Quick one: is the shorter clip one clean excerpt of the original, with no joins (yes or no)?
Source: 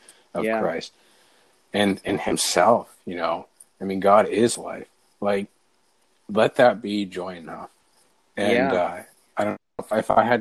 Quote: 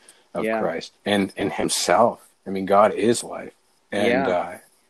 no